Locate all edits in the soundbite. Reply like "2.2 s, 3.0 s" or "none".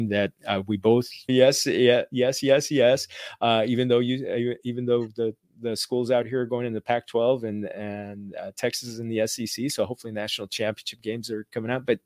1.3 s